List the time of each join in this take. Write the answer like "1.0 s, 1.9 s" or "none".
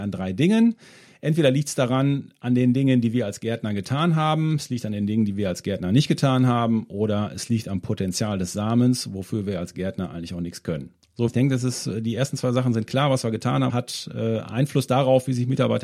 11.3 s, 13.7 s